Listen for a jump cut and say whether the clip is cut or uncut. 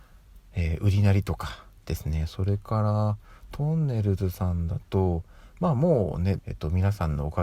cut